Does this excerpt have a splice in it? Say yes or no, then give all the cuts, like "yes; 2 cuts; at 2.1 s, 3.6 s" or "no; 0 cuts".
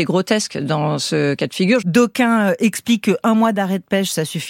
yes; 1 cut; at 1.8 s